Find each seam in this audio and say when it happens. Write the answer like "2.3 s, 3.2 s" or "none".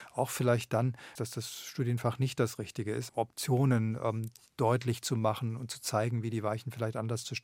1.2 s, 3.1 s

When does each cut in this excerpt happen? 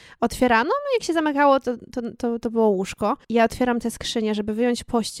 3.2 s

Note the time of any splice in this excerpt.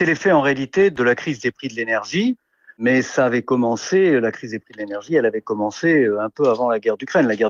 none

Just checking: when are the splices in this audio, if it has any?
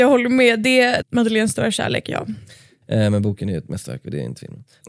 1.0 s, 2.8 s

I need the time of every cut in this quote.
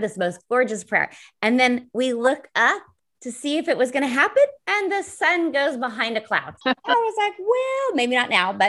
4.6 s, 6.6 s

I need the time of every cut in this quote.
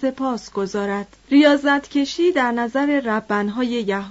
1.2 s

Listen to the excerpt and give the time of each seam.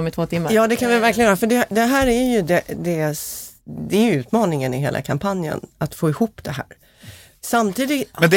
none

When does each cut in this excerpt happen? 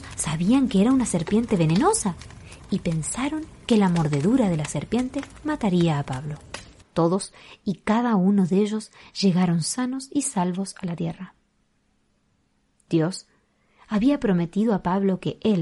6.8 s

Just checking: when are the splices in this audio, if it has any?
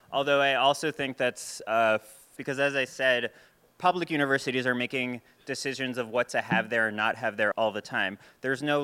2.4 s, 7.5 s

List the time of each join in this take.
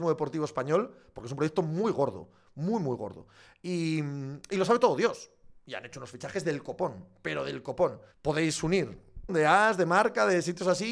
8.1 s, 9.3 s

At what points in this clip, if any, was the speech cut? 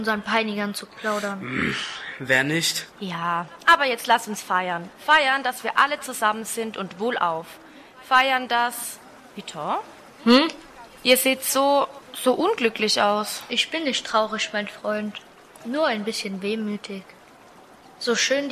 2.9 s

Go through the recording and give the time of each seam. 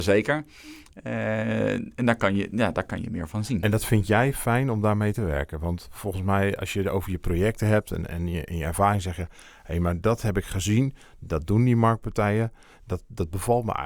none

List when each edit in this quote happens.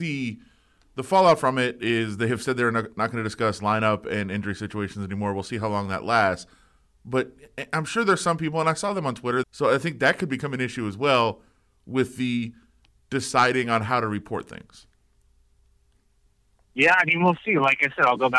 9.4 s

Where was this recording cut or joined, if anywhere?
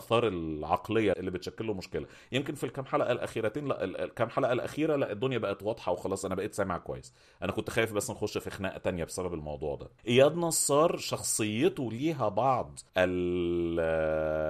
1.1 s, 10.0 s, 12.9 s

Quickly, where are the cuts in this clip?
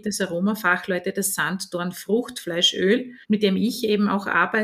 3.2 s

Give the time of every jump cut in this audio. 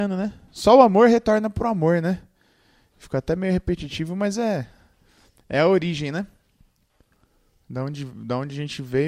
none

